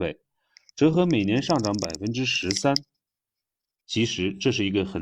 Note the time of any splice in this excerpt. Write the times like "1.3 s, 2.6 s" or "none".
3.8 s